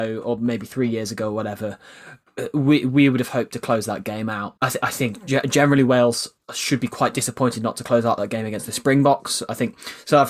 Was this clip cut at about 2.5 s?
no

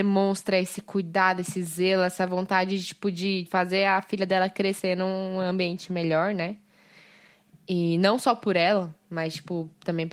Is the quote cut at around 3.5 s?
yes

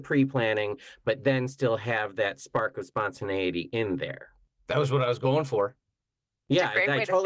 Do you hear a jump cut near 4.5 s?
no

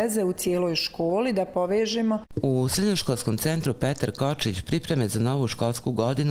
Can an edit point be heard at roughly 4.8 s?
no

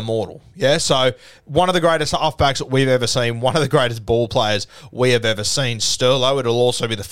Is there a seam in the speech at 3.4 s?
no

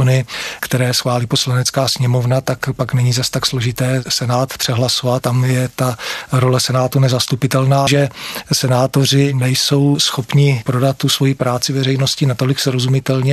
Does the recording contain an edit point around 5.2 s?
yes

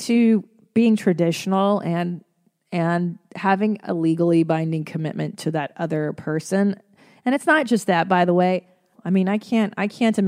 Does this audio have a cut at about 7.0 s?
no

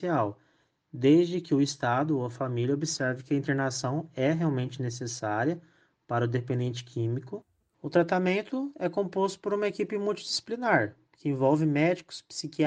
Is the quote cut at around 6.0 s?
no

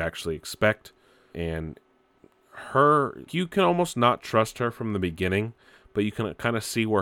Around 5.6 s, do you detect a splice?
no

